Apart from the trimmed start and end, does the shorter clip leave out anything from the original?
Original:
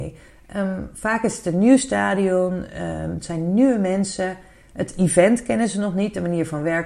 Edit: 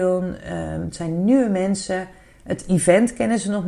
no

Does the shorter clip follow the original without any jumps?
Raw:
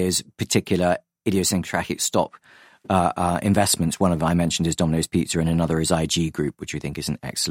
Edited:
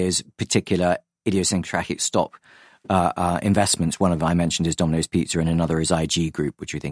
yes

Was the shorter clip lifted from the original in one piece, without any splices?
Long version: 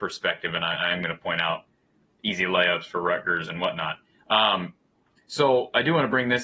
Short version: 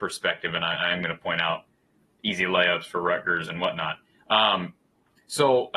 yes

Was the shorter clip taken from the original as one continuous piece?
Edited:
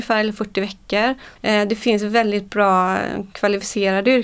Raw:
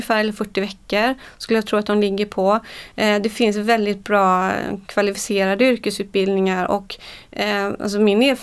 no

